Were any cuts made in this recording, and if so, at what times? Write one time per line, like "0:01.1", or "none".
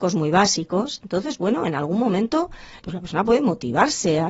0:02.8